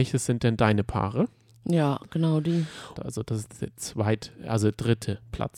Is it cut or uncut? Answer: cut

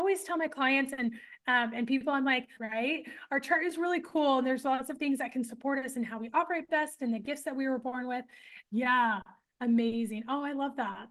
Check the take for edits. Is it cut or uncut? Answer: cut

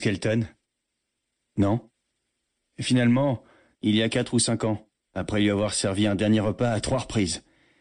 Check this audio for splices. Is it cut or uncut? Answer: cut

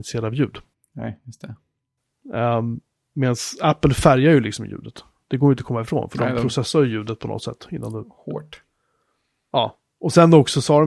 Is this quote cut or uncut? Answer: uncut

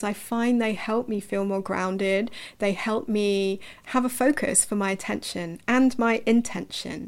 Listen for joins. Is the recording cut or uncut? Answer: cut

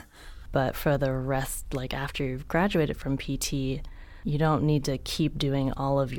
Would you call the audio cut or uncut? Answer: uncut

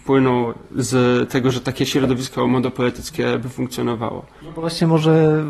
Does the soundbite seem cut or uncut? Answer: uncut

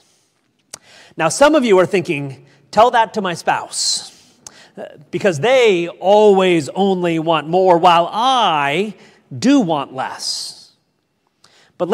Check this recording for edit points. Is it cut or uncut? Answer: uncut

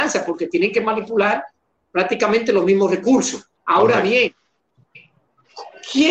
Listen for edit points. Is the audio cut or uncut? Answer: cut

